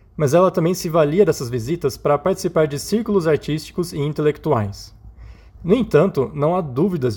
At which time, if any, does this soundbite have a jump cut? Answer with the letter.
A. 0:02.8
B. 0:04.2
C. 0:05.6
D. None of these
C